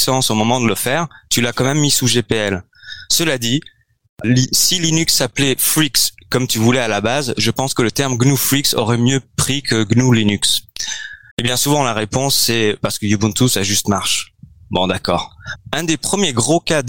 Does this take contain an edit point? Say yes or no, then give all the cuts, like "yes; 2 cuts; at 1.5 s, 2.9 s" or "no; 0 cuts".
yes; 3 cuts; at 4.2 s, 11.3 s, 15.6 s